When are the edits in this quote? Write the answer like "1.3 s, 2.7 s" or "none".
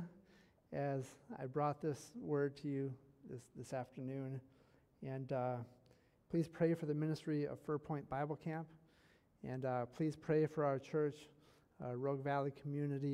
none